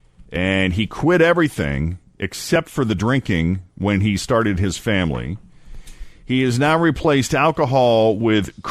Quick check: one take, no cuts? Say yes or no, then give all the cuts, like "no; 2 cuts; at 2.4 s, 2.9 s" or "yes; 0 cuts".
yes; 0 cuts